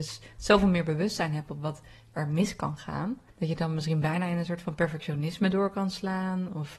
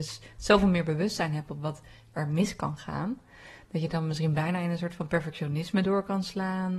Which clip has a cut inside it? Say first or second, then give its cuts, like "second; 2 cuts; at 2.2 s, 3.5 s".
first; 1 cut; at 3.3 s